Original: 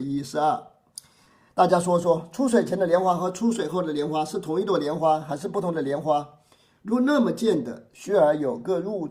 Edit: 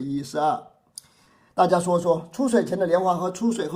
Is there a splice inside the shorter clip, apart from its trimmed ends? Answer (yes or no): no